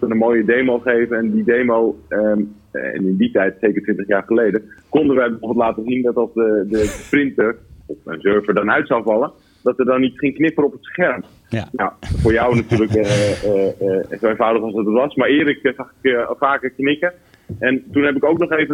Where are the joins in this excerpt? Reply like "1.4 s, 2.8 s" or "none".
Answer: none